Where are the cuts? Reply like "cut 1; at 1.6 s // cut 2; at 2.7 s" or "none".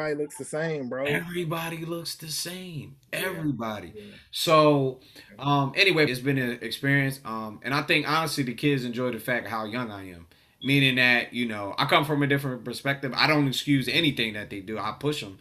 cut 1; at 6.1 s